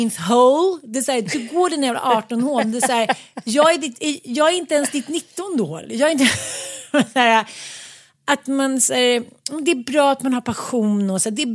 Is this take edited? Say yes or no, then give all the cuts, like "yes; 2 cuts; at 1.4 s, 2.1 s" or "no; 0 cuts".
no; 0 cuts